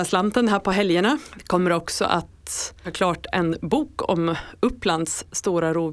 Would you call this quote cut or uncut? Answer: uncut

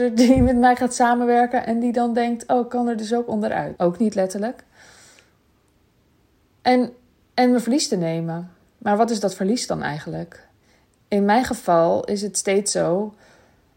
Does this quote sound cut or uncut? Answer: cut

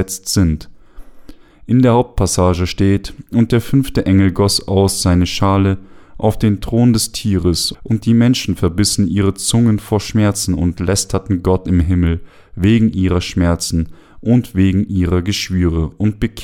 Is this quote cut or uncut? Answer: cut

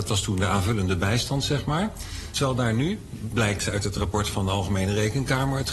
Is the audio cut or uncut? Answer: cut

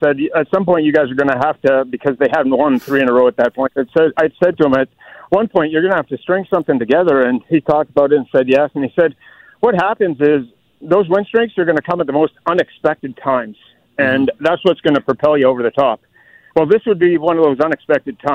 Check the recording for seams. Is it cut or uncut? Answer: uncut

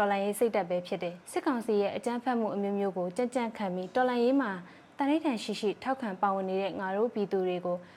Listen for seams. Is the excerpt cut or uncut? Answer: cut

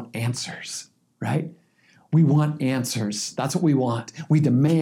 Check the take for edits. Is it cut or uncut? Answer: uncut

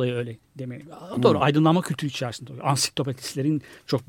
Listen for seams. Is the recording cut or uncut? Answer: uncut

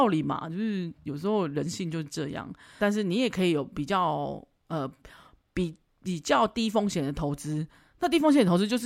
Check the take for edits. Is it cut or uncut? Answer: cut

